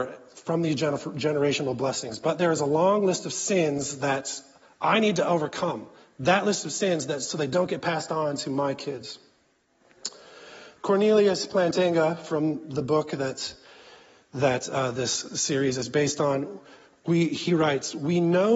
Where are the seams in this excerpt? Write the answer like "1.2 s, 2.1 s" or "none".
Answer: none